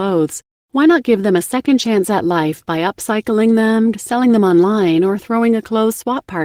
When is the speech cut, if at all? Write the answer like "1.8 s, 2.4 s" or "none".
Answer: 3.9 s

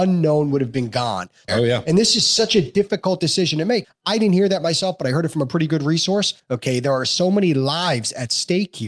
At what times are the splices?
1.5 s, 3.8 s, 6.4 s

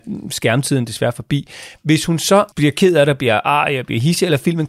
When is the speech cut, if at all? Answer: 2.5 s

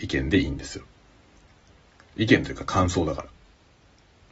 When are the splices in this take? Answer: none

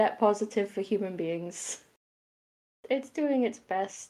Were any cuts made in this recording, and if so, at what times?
2.8 s

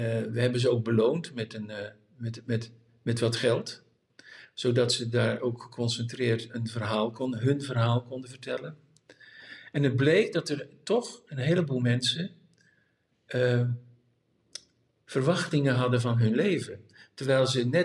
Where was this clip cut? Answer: none

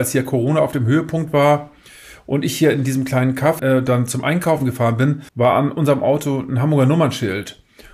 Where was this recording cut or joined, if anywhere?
3.6 s, 5.3 s

